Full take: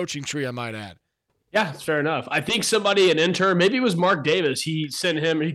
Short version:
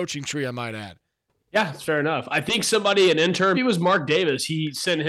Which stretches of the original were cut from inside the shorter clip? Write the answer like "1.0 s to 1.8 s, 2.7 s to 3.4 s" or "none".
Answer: 3.5 s to 3.7 s